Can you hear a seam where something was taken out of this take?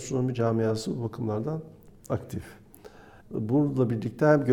yes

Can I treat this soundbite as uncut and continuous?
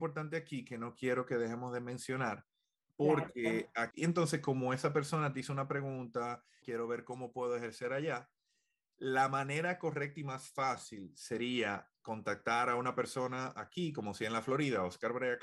no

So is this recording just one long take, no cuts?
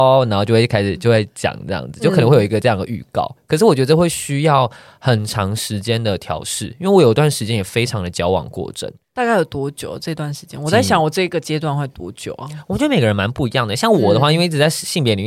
yes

